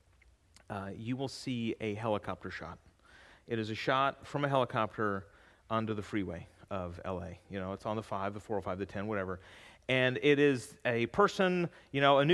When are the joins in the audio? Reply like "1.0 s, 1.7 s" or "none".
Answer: none